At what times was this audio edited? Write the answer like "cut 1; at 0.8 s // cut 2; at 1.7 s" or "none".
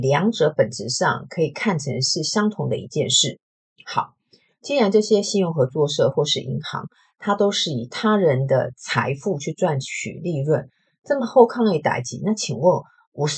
none